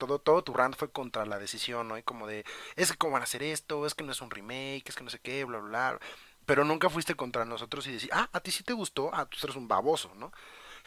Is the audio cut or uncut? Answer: uncut